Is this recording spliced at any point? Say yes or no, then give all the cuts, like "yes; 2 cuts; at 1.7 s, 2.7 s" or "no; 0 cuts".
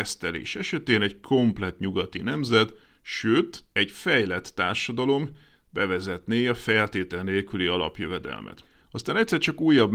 no; 0 cuts